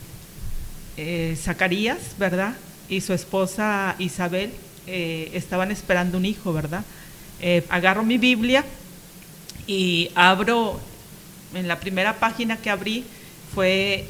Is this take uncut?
no; 1 cut; at 7.7 s

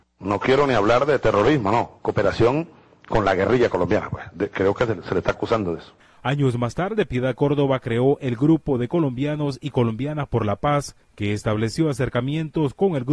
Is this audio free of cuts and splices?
yes; 0 cuts

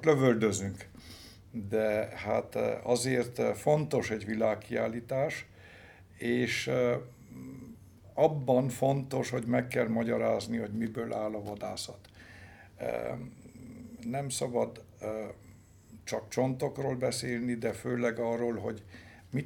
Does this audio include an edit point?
no; 0 cuts

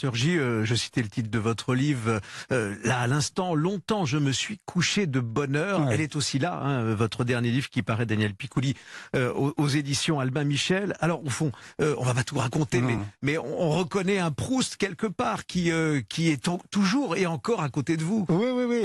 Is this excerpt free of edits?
yes; 0 cuts

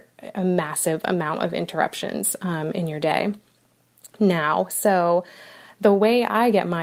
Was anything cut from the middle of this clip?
no; 0 cuts

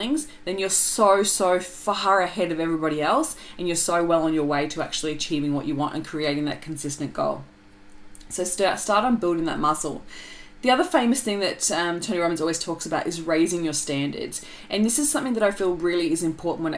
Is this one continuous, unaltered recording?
yes; 0 cuts

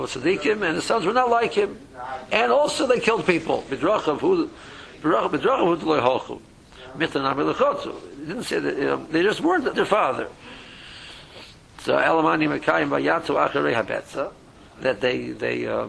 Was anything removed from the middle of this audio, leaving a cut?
yes; 2 cuts; at 3.7 s, 9.7 s

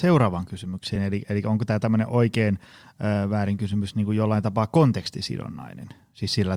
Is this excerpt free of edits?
yes; 0 cuts

